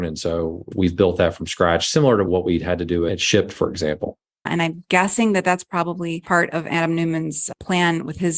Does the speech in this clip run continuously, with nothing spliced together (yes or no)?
no